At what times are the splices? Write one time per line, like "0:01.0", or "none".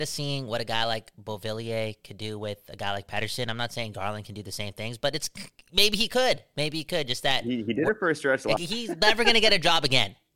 0:08.6